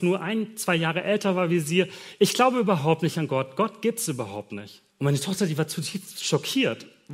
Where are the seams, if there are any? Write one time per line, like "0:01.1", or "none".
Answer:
0:04.9